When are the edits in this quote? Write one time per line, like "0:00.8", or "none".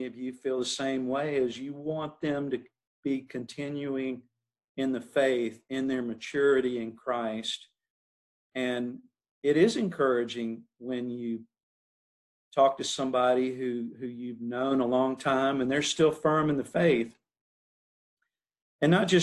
none